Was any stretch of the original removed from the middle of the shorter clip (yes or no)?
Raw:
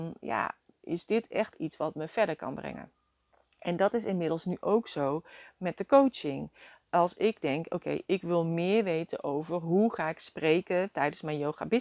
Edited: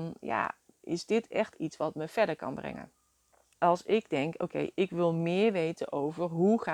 yes